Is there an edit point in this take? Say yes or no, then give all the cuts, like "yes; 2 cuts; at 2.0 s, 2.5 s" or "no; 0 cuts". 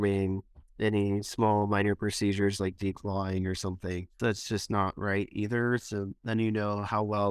yes; 1 cut; at 4.2 s